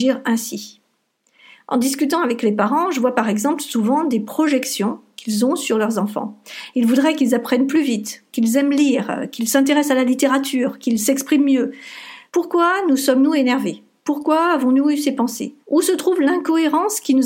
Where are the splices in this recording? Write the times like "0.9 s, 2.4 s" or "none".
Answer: 12.3 s, 15.6 s